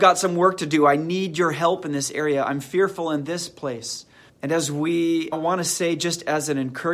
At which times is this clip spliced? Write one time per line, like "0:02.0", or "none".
0:04.3
0:05.3